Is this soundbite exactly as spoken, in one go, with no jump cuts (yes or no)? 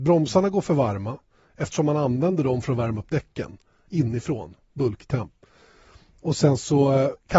yes